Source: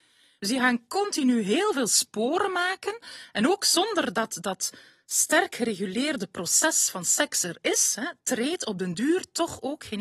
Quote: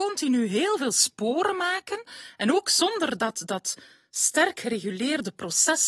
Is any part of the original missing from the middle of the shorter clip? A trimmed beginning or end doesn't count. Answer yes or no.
no